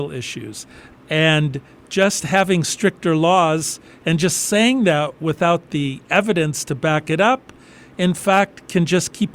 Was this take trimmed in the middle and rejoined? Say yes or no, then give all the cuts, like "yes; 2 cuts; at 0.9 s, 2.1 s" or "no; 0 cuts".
yes; 1 cut; at 0.9 s